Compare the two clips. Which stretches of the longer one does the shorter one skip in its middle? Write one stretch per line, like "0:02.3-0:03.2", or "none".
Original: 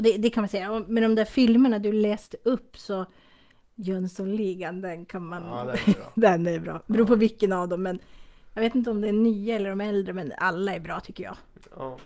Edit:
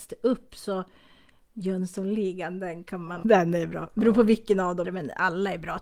0:05.4-0:06.1
0:07.8-0:10.1